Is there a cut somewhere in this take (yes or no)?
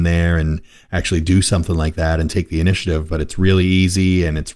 no